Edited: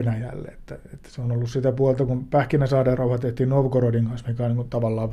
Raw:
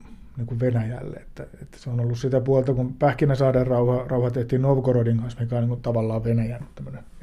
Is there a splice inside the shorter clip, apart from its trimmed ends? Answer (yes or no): yes